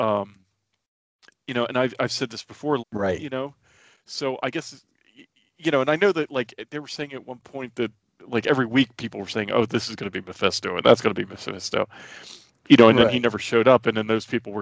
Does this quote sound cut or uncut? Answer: cut